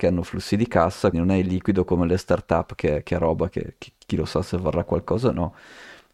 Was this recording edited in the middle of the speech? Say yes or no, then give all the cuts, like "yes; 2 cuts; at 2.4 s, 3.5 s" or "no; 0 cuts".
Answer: yes; 1 cut; at 1.1 s